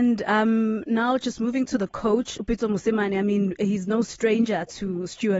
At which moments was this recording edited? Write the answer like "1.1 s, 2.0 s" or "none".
none